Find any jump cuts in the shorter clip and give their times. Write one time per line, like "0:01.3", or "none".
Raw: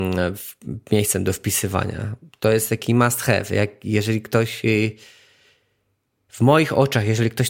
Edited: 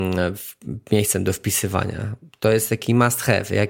none

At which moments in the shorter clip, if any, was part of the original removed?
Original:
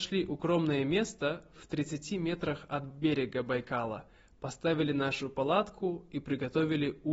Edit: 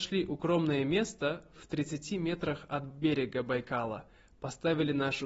none

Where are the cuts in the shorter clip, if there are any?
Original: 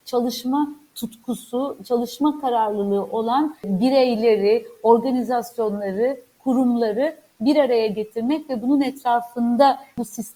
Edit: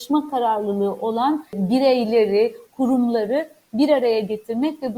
0:02.6

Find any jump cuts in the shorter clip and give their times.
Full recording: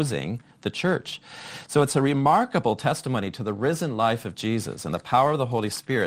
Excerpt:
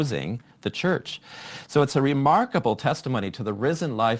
none

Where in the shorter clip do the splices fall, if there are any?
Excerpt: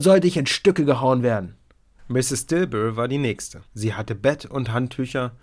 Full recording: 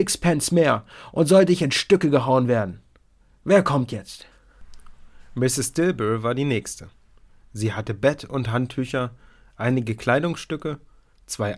0:02.0
0:03.7

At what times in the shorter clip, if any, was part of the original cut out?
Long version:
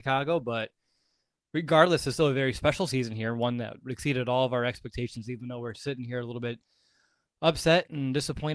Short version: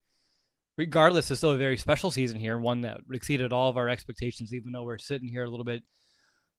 none

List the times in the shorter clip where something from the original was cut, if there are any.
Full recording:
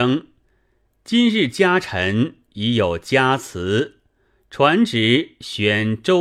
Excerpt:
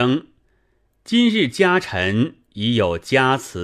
none

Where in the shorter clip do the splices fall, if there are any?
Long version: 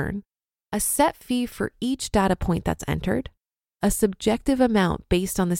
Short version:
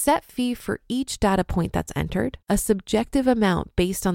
0:02.4

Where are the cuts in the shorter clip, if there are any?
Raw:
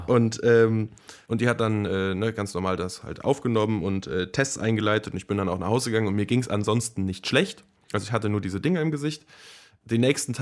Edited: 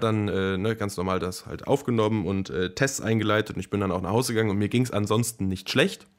none

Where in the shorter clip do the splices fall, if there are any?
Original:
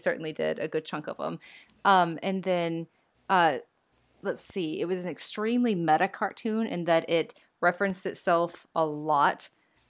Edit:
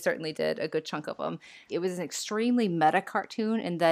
0:01.7

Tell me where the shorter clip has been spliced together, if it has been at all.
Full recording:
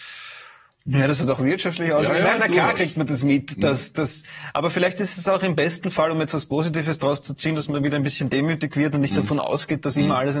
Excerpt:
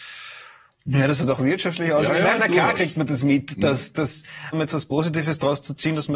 0:04.5

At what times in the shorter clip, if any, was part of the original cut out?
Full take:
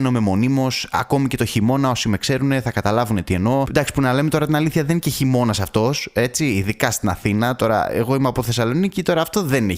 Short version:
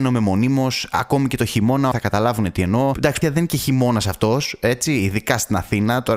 0:01.9
0:03.2

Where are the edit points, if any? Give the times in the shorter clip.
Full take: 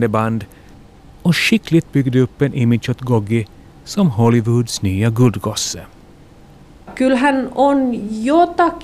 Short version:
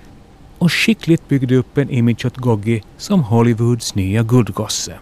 0:02.9

